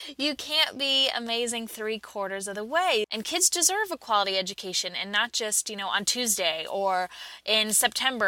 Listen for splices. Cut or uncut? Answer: cut